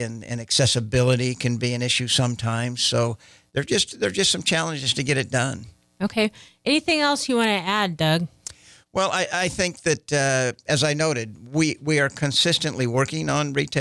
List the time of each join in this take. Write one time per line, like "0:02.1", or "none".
none